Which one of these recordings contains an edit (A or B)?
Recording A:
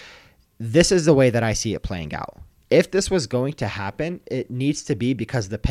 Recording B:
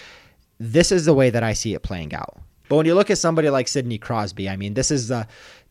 B